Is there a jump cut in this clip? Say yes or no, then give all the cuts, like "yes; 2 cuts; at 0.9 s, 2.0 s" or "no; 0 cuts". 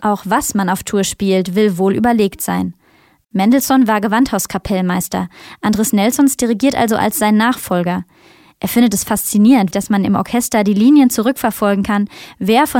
yes; 2 cuts; at 3.2 s, 9.7 s